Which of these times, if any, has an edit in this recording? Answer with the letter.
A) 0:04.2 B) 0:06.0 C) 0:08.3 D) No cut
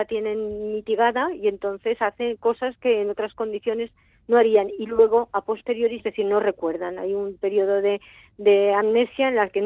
B